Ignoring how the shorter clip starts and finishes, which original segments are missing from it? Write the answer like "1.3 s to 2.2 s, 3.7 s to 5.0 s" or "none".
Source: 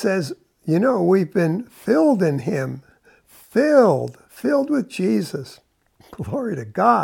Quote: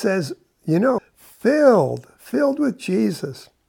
1.0 s to 3.1 s

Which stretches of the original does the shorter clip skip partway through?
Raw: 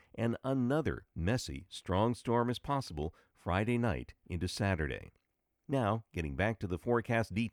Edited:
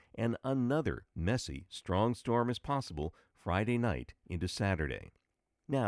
none

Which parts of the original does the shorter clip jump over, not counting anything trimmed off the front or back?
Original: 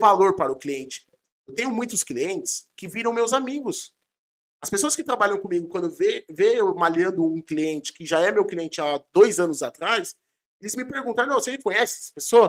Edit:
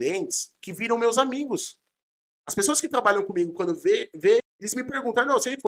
6.5 s to 10.4 s

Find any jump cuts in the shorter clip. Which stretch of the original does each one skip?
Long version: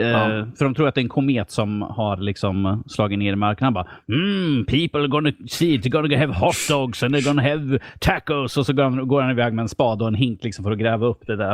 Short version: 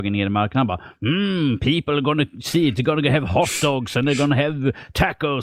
none

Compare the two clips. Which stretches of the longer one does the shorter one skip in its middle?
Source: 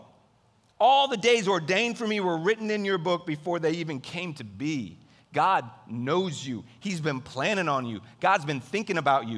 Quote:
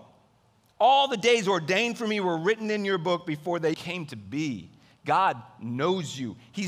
3.7 s to 4.0 s

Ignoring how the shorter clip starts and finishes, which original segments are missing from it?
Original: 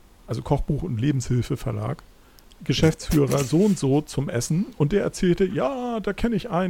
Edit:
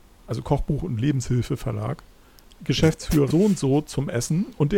3.3 s to 3.5 s

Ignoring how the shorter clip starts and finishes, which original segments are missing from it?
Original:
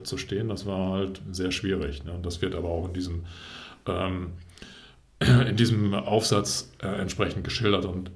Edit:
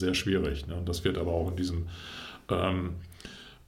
none

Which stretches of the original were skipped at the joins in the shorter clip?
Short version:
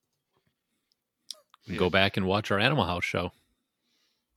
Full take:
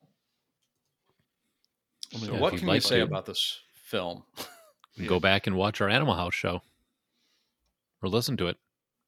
2.1 s to 4.6 s

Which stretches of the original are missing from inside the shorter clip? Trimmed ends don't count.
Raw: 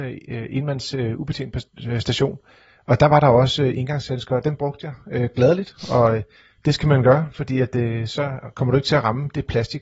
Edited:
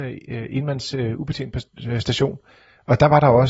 none

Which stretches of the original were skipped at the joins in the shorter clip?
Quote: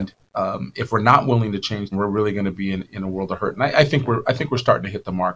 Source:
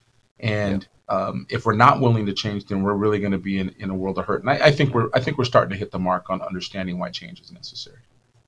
2.7 s to 2.8 s

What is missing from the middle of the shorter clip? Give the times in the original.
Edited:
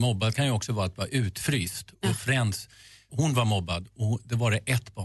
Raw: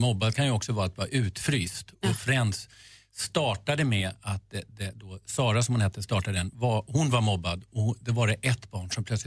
3.1 s to 6.9 s

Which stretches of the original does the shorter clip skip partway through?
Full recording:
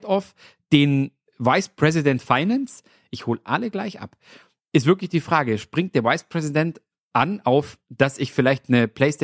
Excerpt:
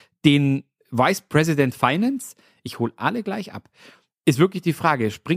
none

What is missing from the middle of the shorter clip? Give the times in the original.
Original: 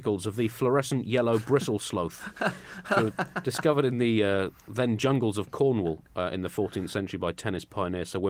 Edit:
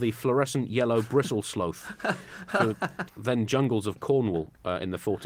3.4 s to 4.6 s

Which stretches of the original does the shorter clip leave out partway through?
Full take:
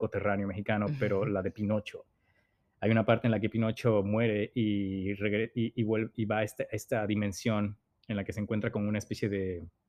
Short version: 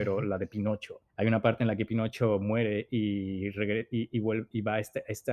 2.1 s to 2.7 s

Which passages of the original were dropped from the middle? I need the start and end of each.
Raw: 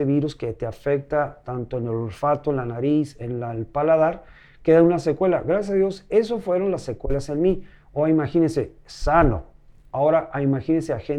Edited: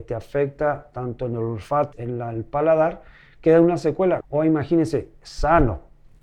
2.4 s to 3.1 s, 5.4 s to 7.8 s

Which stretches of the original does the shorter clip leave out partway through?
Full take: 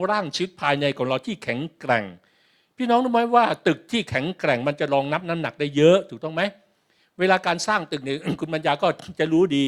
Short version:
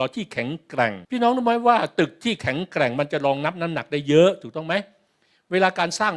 2.2 s to 2.7 s

